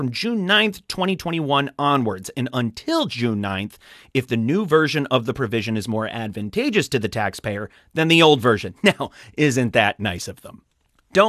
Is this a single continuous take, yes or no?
yes